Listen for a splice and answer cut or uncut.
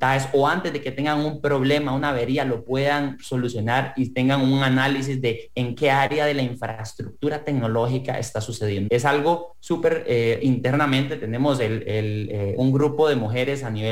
cut